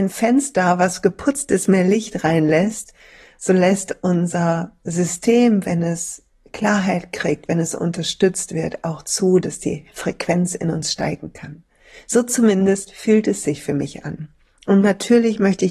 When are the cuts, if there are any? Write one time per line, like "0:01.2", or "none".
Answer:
none